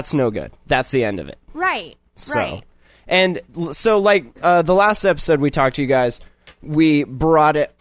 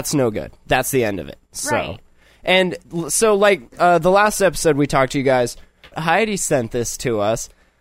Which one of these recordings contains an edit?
second; 2 cuts; at 1.5 s, 5.9 s

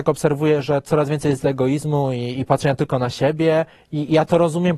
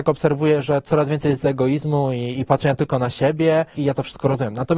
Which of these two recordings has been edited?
second; 1 cut; at 3.7 s

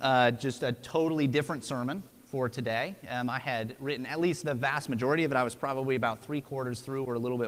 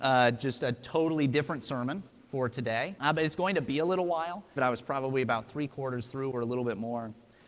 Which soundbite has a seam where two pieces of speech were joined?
second; 2 cuts; at 3.0 s, 4.6 s

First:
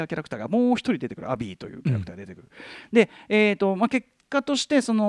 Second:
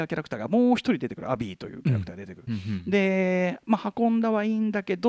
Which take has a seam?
second; 1 cut; at 2.5 s

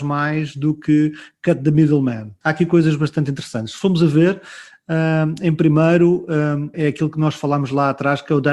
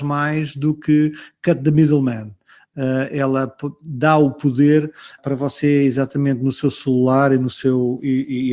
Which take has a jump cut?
first; 2 cuts; at 2.4 s, 6.7 s

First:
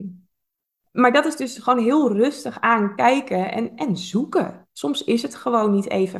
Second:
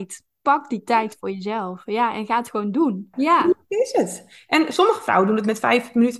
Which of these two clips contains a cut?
second; 1 cut; at 3.1 s

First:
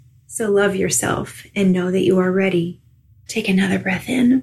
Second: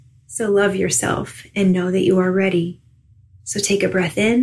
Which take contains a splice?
first; 1 cut; at 3.3 s

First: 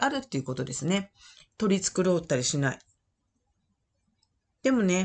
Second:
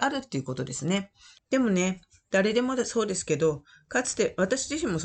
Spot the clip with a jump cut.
second; 1 cut; at 1.4 s

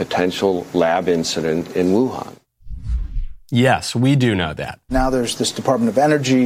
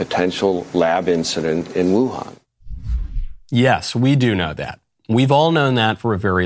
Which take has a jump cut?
first; 1 cut; at 4.9 s

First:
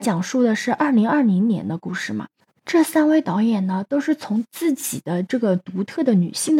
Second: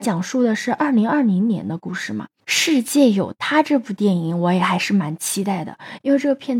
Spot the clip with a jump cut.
second; 1 cut; at 2.4 s

